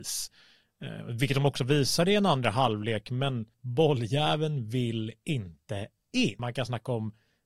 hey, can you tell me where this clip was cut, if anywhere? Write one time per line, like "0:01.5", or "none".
0:03.5